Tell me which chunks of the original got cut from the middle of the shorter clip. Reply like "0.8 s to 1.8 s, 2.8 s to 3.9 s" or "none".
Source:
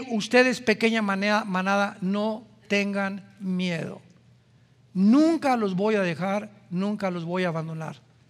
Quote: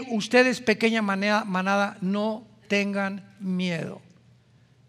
none